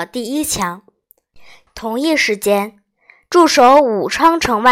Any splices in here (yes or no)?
yes